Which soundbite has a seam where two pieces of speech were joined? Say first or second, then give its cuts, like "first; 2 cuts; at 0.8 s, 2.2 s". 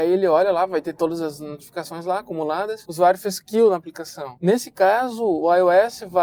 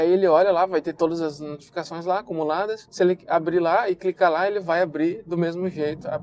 first; 1 cut; at 2.9 s